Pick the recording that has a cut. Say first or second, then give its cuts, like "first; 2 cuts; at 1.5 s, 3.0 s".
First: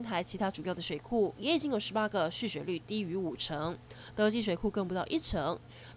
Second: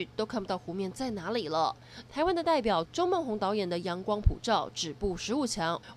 second; 1 cut; at 2.1 s